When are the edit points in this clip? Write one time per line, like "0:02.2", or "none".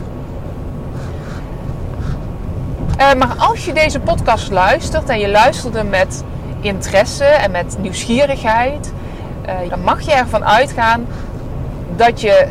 0:09.7